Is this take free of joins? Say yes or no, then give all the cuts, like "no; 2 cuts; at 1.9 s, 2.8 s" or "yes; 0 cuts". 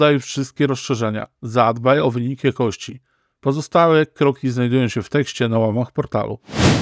yes; 0 cuts